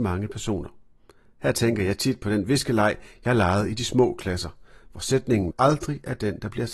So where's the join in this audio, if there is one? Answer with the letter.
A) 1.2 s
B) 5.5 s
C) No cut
B